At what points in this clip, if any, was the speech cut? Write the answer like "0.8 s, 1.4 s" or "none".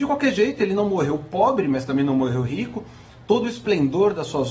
none